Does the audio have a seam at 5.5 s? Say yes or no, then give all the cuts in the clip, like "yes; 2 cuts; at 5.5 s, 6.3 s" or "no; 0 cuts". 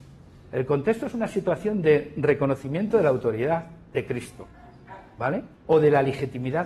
yes; 1 cut; at 5.5 s